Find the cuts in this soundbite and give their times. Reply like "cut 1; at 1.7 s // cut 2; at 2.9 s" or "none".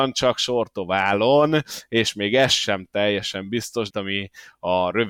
cut 1; at 3.9 s